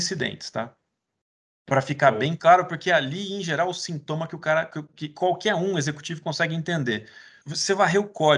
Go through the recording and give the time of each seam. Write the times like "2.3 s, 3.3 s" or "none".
7.4 s